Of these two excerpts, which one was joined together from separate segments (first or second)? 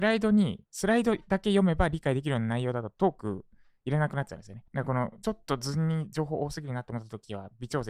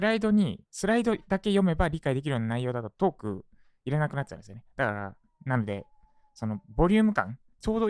first